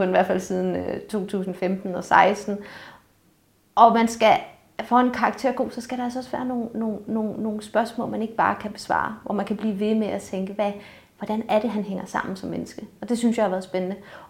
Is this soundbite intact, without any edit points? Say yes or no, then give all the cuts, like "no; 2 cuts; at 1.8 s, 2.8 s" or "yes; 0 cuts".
yes; 0 cuts